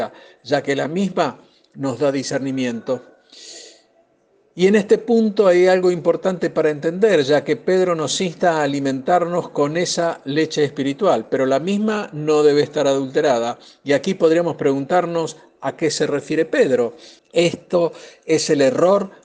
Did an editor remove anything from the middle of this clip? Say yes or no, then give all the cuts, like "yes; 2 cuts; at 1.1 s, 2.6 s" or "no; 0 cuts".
yes; 1 cut; at 17.2 s